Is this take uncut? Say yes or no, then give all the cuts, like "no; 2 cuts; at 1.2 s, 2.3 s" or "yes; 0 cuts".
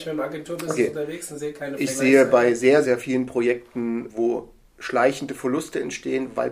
no; 2 cuts; at 2.8 s, 4.1 s